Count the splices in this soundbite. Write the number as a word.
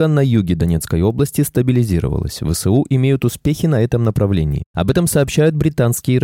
zero